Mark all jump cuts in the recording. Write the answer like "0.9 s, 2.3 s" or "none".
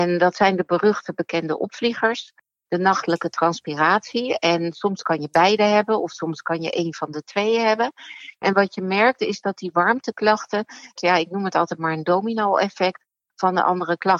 11.0 s